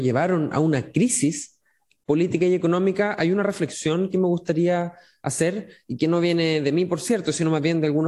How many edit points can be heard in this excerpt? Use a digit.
0